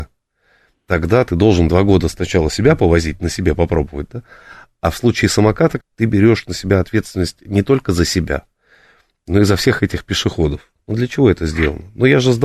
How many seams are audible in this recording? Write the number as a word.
two